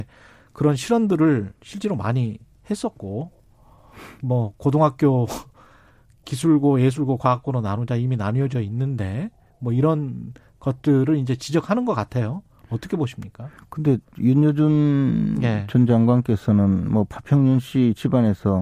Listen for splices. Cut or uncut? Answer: uncut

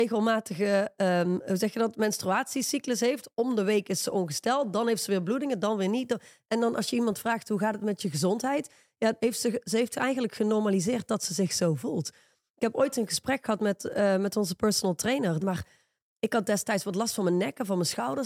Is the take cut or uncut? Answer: cut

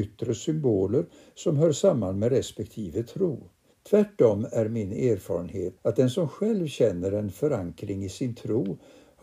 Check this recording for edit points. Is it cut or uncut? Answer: cut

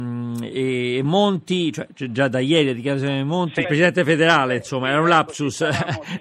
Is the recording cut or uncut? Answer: cut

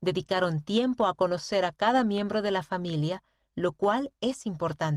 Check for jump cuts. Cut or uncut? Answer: uncut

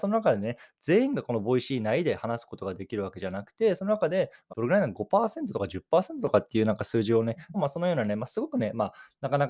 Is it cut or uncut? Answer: cut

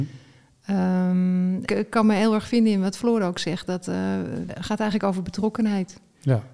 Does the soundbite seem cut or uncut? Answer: cut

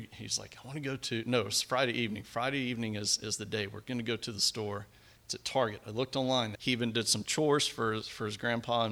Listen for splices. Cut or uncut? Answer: cut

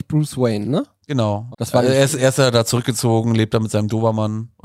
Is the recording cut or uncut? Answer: cut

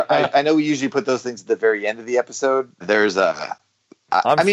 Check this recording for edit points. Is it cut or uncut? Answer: cut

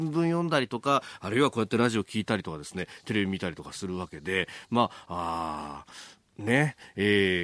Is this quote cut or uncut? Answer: uncut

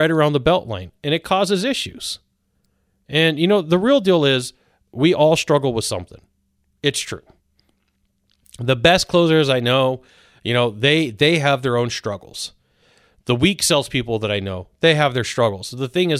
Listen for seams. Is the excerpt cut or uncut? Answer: uncut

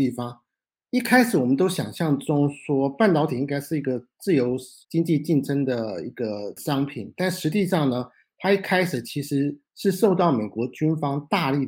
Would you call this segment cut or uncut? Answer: uncut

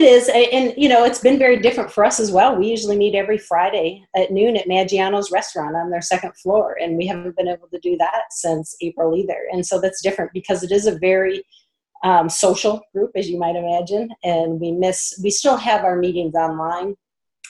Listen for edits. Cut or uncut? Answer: uncut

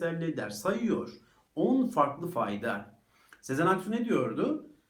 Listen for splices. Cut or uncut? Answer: uncut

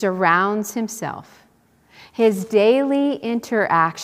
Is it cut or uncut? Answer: uncut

